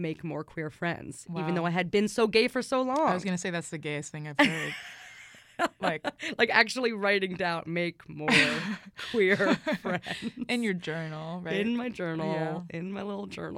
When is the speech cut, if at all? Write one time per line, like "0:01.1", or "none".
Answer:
none